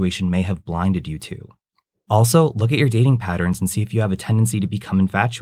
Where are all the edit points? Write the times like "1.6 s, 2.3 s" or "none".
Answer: none